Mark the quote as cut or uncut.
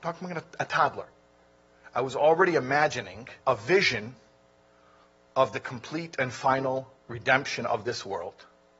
cut